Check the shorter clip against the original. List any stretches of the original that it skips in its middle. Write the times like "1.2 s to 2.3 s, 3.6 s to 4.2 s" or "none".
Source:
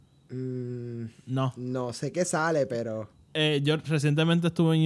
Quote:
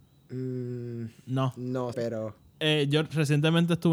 1.9 s to 2.7 s